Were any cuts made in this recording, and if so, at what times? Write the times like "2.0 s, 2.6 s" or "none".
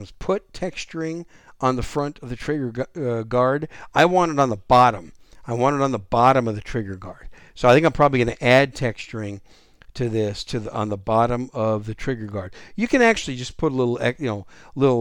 none